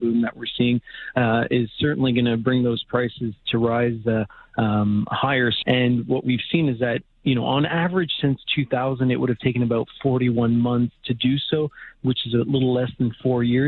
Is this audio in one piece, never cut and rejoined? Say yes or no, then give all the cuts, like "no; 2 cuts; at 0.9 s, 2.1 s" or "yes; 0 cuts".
no; 1 cut; at 5.6 s